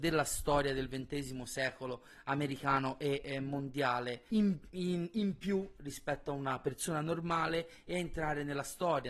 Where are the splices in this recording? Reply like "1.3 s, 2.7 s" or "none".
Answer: 4.3 s